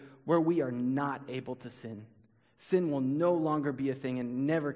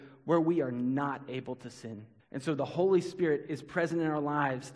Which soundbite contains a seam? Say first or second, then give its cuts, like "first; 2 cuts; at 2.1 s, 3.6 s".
second; 1 cut; at 2.2 s